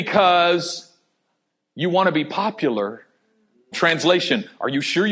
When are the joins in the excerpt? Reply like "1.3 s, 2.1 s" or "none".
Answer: 3.7 s